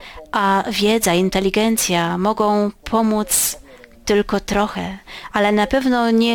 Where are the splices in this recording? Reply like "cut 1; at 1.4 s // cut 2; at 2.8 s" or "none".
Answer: none